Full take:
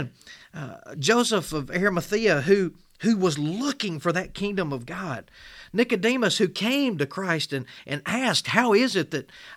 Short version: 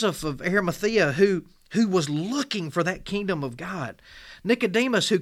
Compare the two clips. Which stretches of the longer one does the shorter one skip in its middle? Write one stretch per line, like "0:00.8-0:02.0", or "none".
none